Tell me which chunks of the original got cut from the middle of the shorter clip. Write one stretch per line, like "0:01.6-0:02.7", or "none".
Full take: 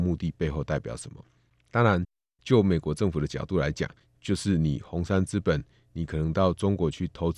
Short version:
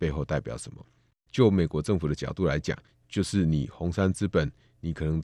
0:01.5-0:02.2